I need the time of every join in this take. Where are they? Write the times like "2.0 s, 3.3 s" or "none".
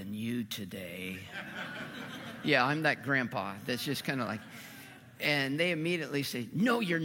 none